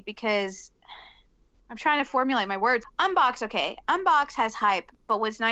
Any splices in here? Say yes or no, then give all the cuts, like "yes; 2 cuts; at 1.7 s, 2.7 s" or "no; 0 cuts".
no; 0 cuts